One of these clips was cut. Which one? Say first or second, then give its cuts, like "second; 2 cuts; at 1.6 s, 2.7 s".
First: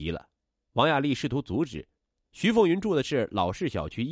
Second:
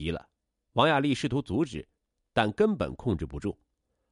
first; 1 cut; at 2.2 s